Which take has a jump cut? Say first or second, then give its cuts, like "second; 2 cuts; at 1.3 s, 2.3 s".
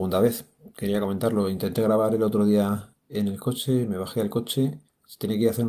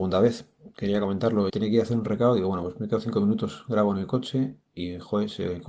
second; 1 cut; at 1.5 s